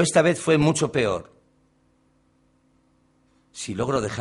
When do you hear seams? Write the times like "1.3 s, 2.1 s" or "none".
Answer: none

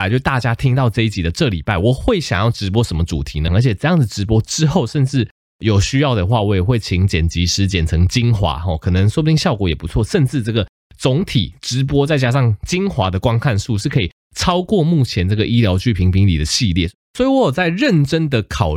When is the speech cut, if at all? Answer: 3.5 s

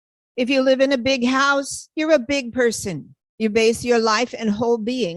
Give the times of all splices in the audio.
3.2 s

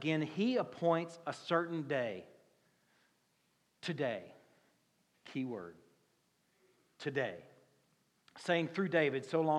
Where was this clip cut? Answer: none

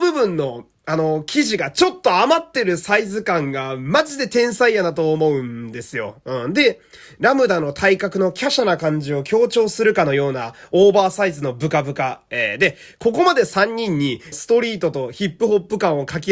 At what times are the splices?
6.2 s, 12.3 s, 14.3 s

